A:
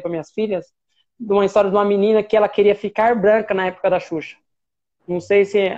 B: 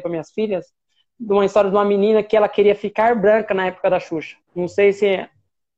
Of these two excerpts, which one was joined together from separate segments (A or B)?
B